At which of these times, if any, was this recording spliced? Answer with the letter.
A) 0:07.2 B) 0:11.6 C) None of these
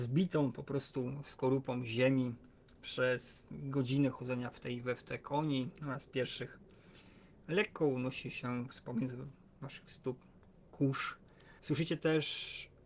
B